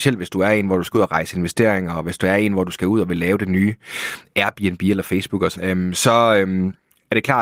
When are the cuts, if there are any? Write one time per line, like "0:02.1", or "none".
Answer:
0:05.6

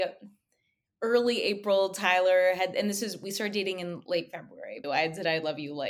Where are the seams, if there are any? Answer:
0:04.8

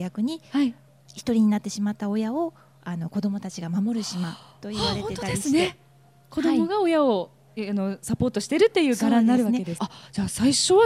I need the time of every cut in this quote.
0:09.8

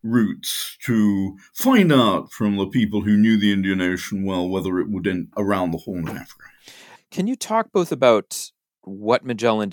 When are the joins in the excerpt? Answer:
0:05.3
0:07.0

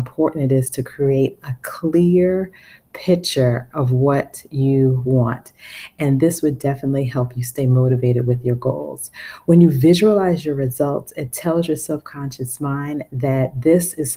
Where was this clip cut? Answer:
none

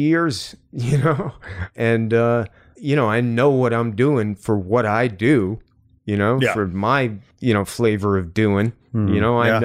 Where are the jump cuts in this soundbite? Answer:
none

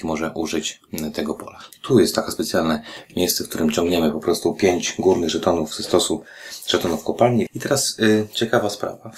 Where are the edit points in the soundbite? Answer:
0:01.7
0:07.5

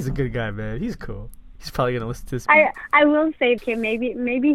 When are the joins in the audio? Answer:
0:02.5
0:03.6

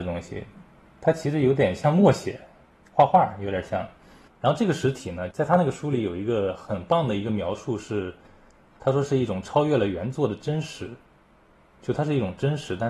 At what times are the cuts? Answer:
0:04.3

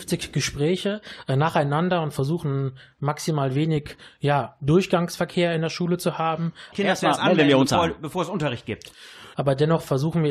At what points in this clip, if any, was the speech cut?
0:06.7
0:09.3

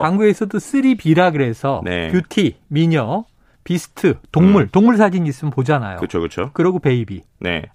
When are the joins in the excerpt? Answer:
none

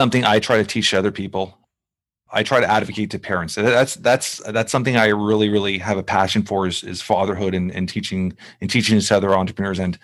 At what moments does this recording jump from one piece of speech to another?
none

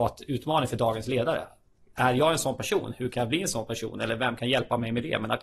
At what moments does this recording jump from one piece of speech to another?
none

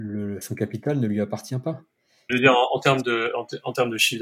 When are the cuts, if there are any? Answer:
0:02.3

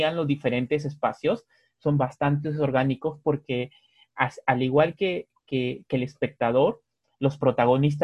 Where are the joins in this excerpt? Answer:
none

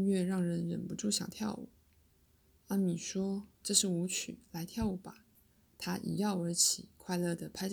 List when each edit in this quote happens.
0:05.4

